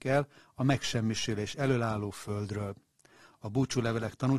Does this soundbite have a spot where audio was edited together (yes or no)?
no